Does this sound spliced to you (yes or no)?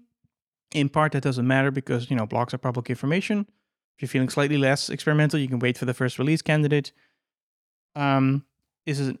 yes